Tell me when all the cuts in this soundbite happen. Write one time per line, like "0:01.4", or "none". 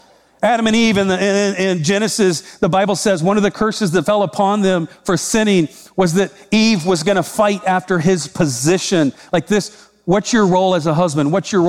none

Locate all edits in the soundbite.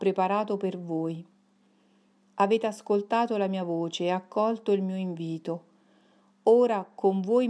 none

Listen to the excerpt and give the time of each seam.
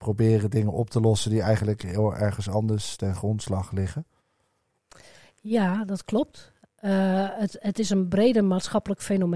none

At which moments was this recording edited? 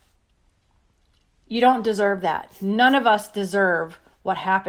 none

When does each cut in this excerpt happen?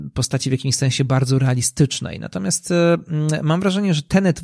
none

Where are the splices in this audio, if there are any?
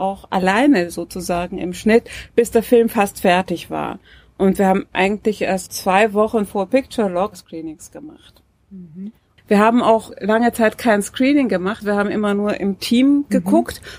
0:05.7
0:09.4
0:11.8

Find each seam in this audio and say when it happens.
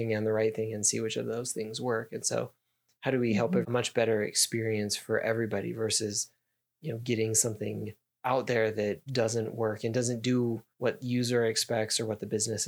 0:03.6
0:09.1
0:10.7

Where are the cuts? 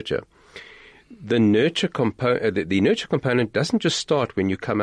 none

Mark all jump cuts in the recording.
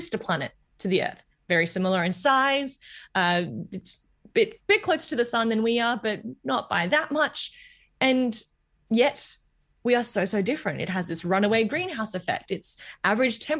none

